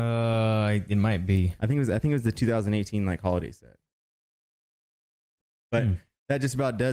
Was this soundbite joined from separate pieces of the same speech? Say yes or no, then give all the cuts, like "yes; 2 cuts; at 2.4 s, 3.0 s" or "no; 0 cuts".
no; 0 cuts